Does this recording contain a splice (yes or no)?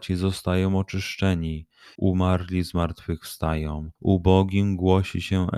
yes